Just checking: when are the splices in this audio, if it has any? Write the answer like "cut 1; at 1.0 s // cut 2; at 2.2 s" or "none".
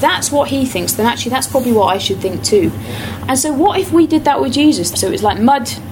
cut 1; at 3.2 s // cut 2; at 4.9 s